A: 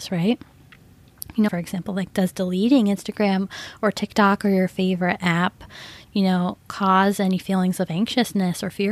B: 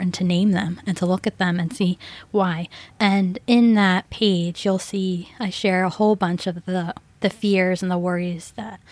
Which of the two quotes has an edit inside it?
A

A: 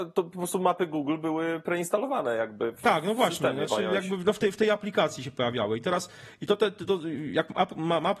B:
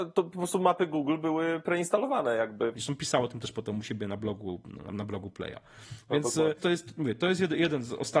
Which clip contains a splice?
B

